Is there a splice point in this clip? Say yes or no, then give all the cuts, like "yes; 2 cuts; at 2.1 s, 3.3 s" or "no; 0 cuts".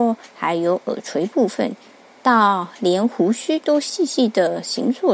yes; 1 cut; at 2.2 s